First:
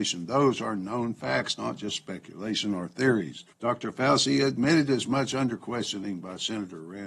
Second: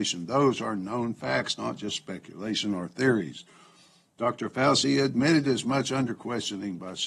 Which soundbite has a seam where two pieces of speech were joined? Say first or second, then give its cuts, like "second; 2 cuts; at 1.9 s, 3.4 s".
first; 1 cut; at 3.5 s